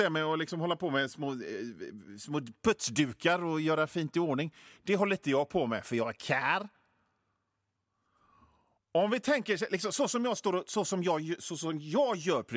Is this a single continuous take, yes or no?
yes